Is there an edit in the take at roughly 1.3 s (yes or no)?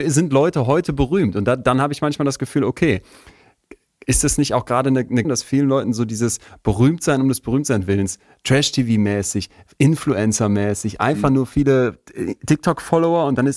no